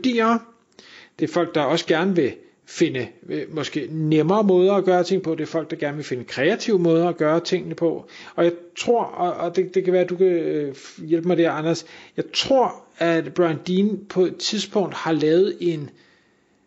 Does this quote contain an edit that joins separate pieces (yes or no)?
no